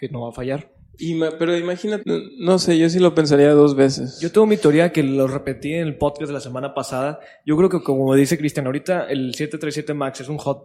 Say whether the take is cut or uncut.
cut